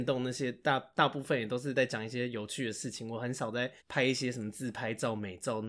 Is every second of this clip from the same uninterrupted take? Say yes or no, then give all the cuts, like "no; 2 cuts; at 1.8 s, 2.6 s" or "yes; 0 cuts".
no; 1 cut; at 3.8 s